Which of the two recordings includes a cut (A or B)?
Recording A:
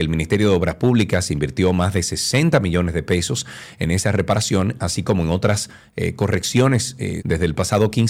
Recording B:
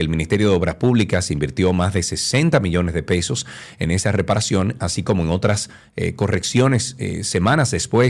A